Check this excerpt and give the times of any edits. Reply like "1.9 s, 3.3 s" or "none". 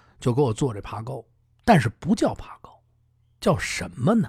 none